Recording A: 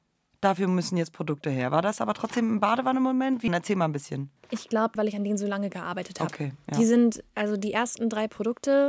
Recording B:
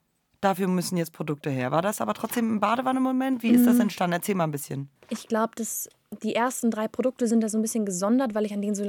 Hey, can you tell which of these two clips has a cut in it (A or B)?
A